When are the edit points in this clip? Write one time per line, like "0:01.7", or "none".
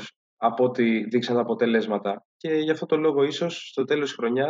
none